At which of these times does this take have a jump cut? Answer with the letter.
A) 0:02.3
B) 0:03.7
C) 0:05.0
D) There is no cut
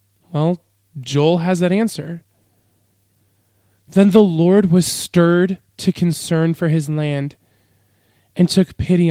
D